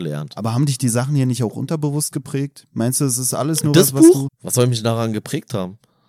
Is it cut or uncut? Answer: cut